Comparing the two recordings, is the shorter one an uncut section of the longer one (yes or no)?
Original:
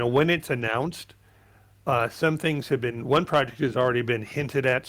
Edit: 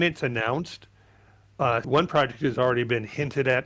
no